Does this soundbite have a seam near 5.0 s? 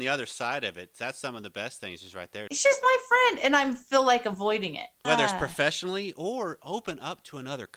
yes; 2 cuts; at 2.5 s, 5.0 s

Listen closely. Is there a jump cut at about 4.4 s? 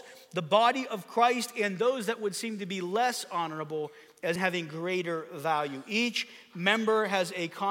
yes; 1 cut; at 4.4 s

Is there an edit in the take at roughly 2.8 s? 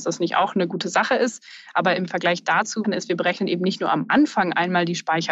yes; 1 cut; at 2.8 s

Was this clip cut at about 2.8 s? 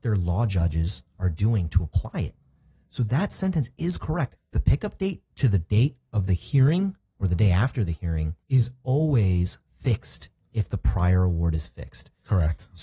no; 2 cuts; at 4.4 s, 8.4 s

